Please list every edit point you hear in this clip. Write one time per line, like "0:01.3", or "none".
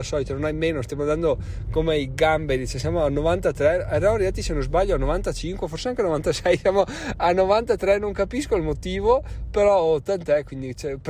none